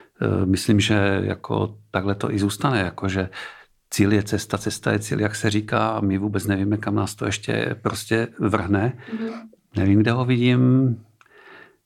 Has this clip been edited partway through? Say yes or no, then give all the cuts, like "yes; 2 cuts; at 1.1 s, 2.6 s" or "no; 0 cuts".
yes; 1 cut; at 9.6 s